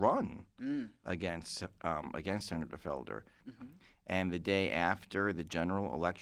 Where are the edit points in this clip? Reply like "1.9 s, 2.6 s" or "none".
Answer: 3.4 s